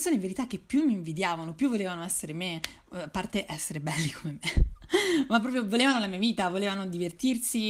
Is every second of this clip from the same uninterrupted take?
yes; 0 cuts

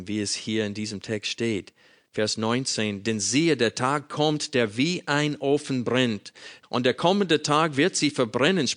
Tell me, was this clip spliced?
yes; 1 cut; at 6.6 s

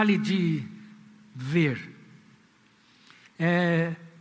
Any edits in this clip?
yes; 1 cut; at 3.3 s

